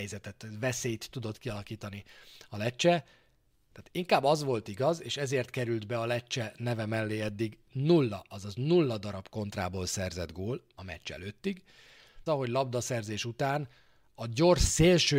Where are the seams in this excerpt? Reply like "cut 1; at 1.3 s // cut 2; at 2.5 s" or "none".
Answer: cut 1; at 3.7 s // cut 2; at 12.3 s